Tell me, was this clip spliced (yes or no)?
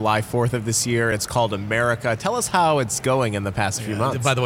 no